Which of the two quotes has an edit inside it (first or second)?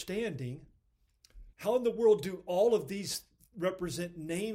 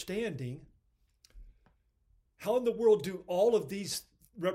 first